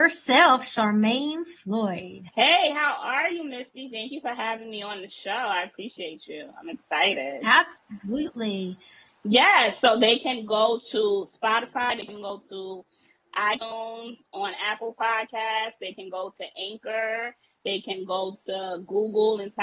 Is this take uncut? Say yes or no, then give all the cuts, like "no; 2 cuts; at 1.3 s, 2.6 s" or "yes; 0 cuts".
no; 2 cuts; at 2.3 s, 9.1 s